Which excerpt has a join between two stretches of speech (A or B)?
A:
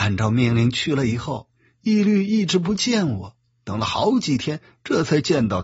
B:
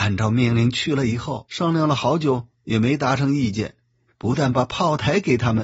B